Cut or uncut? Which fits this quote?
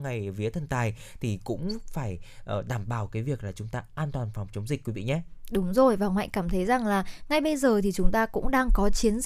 uncut